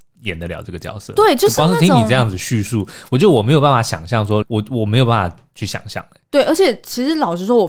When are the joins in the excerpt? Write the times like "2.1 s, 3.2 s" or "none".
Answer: 4.4 s